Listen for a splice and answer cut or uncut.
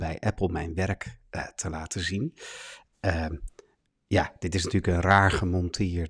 cut